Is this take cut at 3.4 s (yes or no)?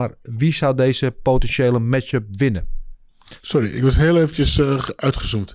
no